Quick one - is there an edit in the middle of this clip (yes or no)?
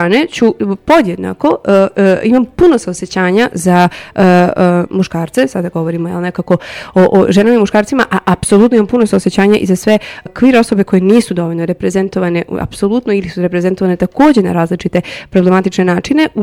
yes